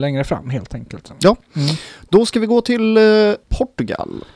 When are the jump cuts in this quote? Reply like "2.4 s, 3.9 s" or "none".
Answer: 3.4 s